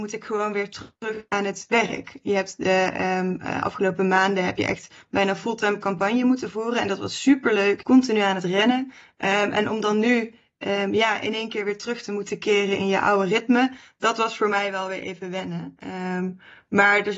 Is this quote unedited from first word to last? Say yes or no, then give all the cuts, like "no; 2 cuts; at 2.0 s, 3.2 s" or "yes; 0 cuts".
no; 1 cut; at 7.8 s